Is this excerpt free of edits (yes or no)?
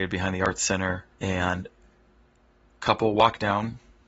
no